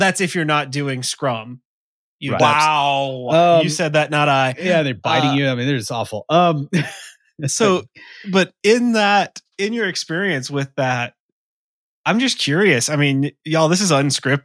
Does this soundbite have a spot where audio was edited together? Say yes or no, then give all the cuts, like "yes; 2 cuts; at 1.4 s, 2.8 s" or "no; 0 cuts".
yes; 1 cut; at 2.4 s